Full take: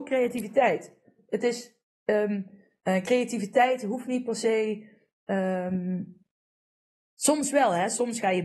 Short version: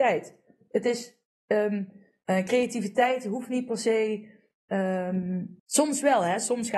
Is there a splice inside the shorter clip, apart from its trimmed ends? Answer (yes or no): yes